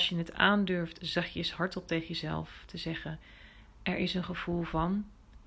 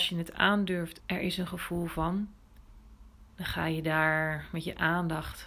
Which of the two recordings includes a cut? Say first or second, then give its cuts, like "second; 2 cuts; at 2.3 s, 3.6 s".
second; 2 cuts; at 1.0 s, 3.3 s